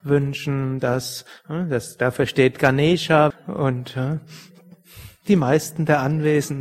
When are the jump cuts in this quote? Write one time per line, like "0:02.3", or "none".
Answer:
0:03.3